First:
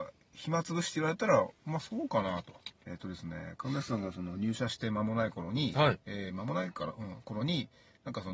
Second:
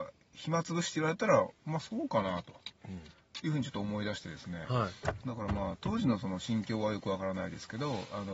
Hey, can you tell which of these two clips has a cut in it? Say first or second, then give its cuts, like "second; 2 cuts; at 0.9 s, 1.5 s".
first; 1 cut; at 2.8 s